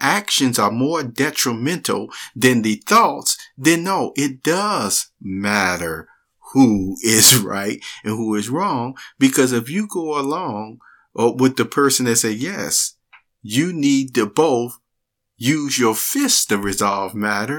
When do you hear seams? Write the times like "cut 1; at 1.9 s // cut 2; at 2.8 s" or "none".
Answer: none